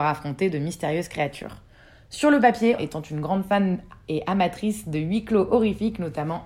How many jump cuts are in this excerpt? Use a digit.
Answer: 1